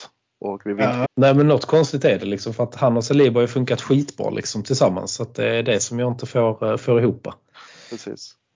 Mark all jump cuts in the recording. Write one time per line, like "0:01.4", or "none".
0:01.0